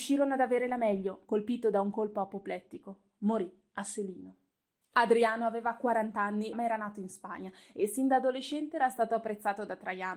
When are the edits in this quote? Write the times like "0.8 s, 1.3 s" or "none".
1.2 s, 4.8 s, 6.5 s